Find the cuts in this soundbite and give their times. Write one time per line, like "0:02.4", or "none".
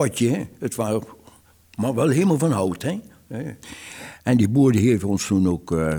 none